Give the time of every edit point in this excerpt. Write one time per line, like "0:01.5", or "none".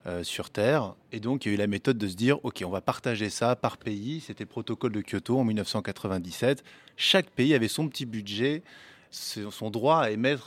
none